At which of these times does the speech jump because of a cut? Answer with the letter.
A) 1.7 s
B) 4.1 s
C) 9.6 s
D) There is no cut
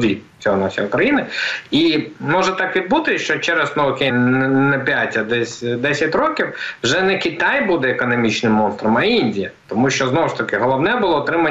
B